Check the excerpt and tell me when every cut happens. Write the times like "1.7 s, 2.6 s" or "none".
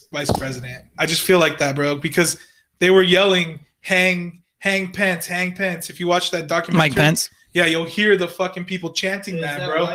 none